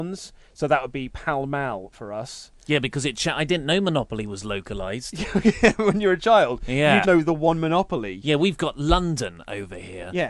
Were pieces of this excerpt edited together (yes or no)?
yes